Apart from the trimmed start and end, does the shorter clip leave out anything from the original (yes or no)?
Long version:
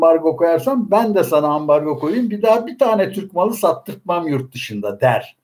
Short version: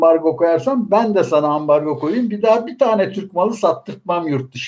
no